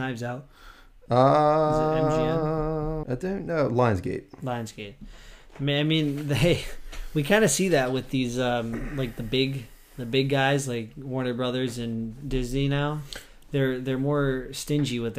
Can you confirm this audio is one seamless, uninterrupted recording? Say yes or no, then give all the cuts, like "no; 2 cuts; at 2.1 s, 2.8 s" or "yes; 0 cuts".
no; 1 cut; at 3.0 s